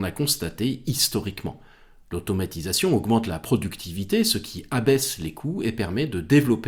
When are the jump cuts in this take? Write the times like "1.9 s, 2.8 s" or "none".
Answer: none